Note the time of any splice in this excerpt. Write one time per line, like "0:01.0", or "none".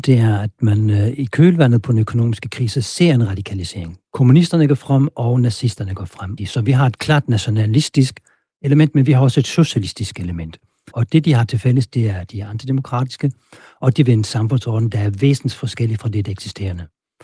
0:06.4
0:10.9